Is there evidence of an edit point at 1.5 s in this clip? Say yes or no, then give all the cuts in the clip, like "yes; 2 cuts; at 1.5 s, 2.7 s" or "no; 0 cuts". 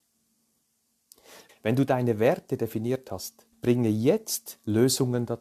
yes; 2 cuts; at 1.5 s, 3.5 s